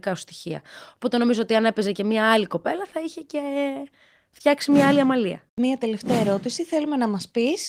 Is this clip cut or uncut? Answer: cut